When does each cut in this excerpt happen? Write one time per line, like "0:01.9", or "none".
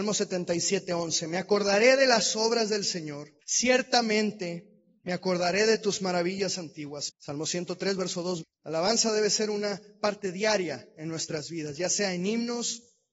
0:03.4
0:07.1
0:08.4